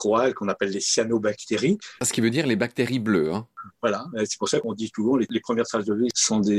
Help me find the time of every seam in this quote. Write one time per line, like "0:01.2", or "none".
none